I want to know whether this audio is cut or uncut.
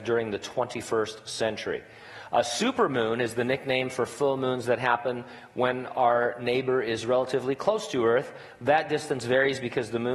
uncut